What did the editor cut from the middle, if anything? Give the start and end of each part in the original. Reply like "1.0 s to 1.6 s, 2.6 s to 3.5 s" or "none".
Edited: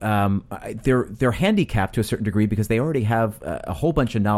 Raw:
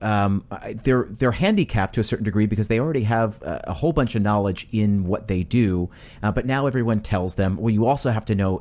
none